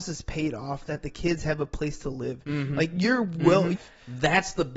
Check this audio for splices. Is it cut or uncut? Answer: cut